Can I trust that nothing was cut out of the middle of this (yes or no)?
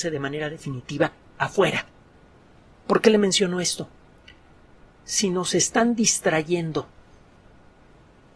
no